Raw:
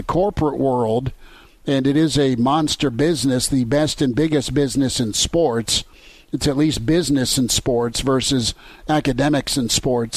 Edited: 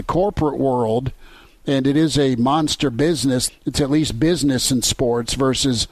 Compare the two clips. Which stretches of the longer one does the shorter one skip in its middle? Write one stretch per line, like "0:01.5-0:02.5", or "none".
0:03.5-0:06.2